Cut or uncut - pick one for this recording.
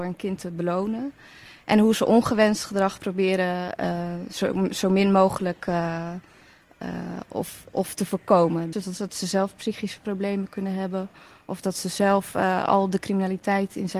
cut